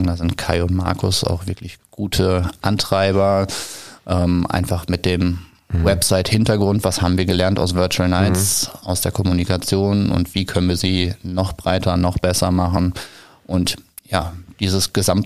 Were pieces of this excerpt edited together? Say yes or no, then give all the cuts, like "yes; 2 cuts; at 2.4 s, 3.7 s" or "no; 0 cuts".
no; 0 cuts